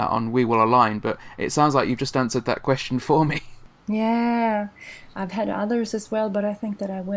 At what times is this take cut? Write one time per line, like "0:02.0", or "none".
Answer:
none

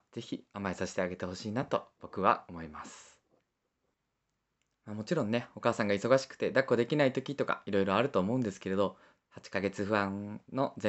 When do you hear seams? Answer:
0:09.2

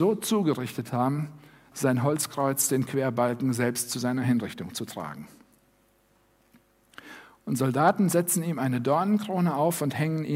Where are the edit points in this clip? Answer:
0:01.7

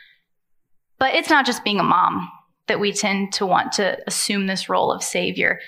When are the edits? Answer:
none

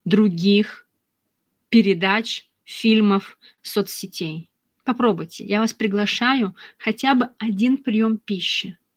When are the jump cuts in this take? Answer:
none

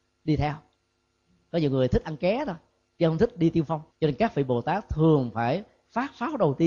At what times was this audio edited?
0:03.9

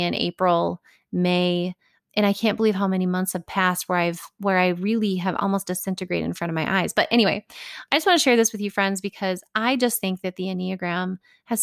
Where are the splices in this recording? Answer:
0:02.1

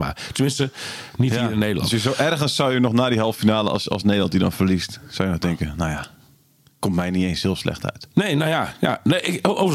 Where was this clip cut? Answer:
none

